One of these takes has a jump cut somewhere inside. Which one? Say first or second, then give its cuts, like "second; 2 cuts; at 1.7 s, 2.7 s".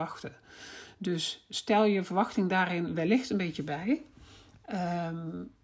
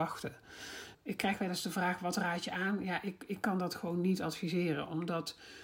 second; 1 cut; at 0.9 s